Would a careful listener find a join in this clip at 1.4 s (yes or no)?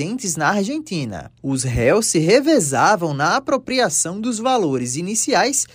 yes